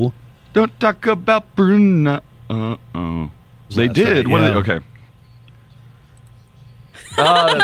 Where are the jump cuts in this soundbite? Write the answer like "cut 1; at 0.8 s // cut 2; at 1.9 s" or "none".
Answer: cut 1; at 3.7 s